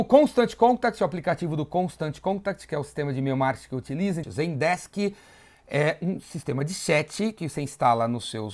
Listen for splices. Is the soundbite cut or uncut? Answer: cut